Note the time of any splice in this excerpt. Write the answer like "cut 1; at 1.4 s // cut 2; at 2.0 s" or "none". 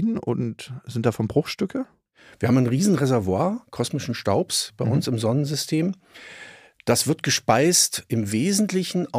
none